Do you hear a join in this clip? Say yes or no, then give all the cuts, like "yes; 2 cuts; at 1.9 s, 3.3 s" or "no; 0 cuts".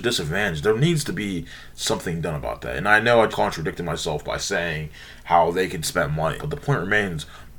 yes; 2 cuts; at 3.3 s, 6.4 s